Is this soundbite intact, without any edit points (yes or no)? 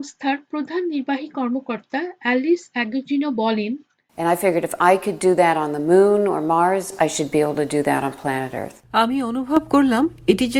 yes